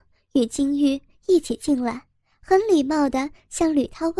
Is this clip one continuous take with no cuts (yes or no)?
yes